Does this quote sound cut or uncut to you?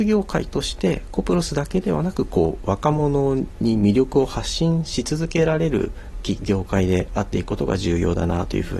cut